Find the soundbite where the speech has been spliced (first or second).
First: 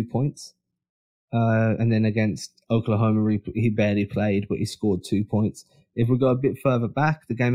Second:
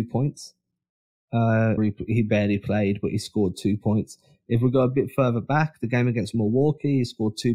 second